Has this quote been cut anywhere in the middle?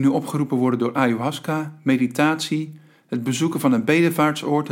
no; 0 cuts

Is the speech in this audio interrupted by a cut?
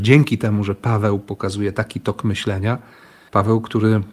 no; 0 cuts

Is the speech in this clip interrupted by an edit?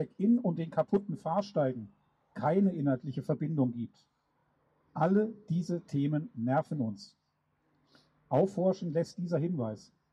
no; 0 cuts

